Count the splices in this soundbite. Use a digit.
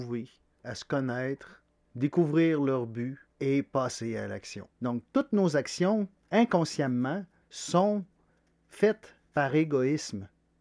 1